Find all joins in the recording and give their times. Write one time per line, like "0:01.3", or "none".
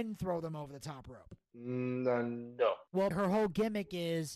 0:01.5
0:03.1